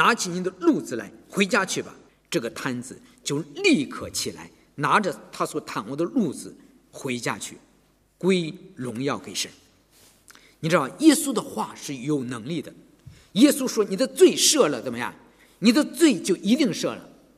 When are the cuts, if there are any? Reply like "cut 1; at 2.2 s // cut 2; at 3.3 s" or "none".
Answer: cut 1; at 2.1 s